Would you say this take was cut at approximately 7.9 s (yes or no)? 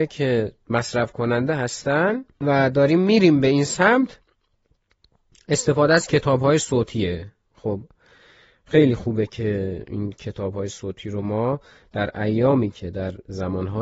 no